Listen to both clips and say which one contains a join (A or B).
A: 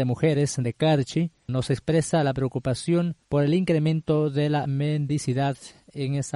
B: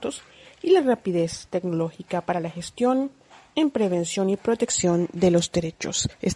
A